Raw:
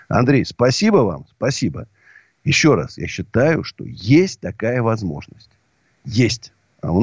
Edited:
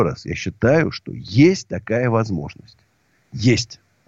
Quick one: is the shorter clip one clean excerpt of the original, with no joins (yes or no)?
yes